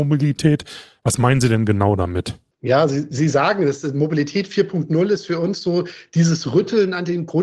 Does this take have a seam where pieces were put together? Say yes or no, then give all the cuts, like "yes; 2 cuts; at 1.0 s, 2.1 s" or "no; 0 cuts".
no; 0 cuts